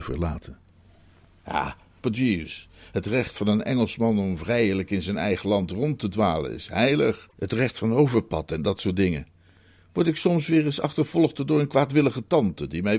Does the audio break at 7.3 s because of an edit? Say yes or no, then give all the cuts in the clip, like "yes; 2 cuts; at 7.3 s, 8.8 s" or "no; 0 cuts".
no; 1 cut; at 2.0 s